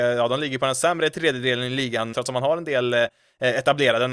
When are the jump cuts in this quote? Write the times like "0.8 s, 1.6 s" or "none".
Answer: 2.1 s